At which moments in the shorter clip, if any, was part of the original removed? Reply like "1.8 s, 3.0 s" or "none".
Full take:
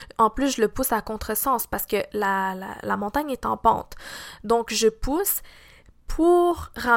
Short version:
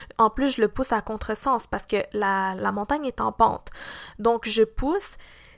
2.6 s